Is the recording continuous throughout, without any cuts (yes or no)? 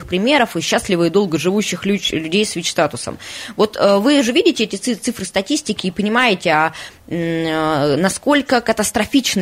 yes